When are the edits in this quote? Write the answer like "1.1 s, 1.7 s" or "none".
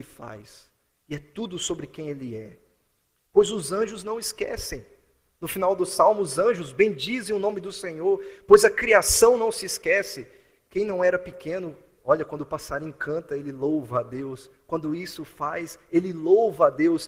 12.0 s